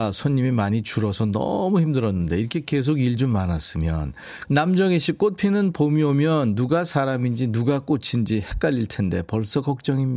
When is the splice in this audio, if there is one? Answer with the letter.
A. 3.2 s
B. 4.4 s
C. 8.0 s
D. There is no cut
B